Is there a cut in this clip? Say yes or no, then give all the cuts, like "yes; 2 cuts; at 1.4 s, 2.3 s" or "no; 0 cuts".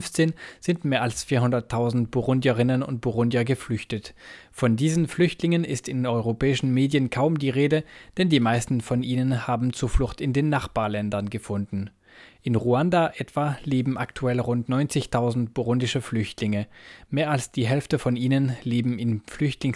no; 0 cuts